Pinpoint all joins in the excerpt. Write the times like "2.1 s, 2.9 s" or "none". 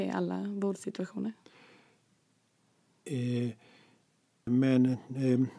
4.5 s